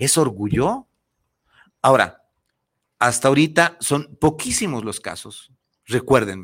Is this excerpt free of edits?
yes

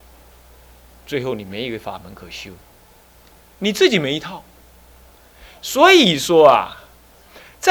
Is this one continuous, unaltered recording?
yes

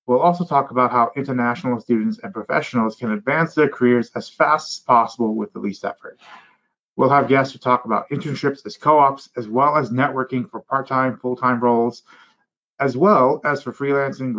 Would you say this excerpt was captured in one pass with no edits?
yes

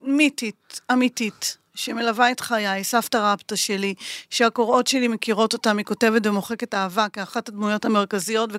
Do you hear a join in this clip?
no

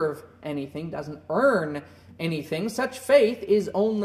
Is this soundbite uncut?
yes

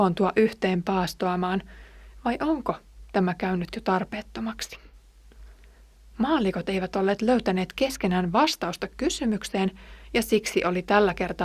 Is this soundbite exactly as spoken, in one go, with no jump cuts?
yes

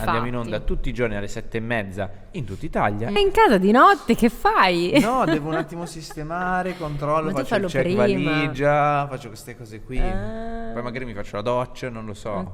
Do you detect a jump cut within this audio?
yes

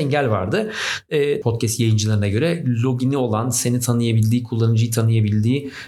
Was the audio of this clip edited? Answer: yes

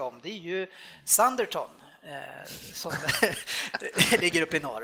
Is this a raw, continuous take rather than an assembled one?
yes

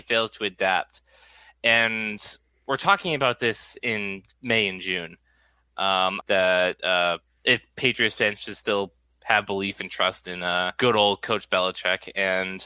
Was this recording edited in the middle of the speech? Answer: yes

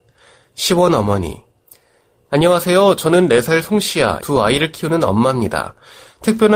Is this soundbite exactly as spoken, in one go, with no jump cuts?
no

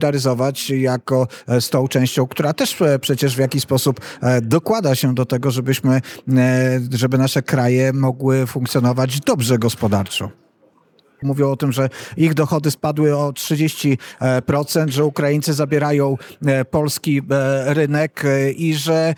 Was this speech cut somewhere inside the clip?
yes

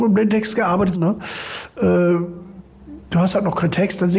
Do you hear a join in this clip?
yes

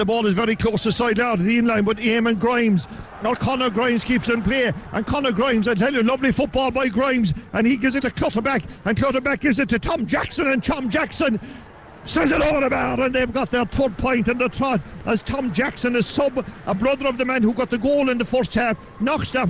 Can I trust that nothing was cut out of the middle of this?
no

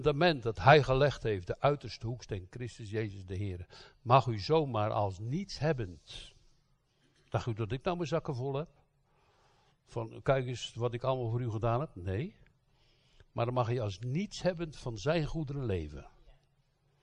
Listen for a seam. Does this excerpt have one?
no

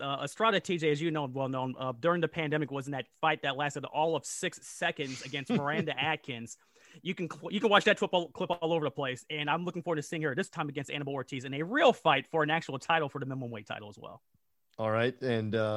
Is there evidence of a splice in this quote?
no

